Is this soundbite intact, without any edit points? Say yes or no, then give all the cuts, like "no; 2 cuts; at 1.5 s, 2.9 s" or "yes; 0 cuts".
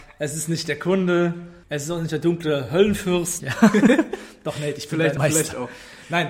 no; 3 cuts; at 1.6 s, 3.4 s, 5.2 s